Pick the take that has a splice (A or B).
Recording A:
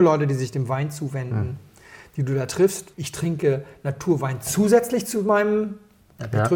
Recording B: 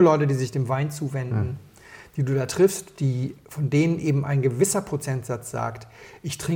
A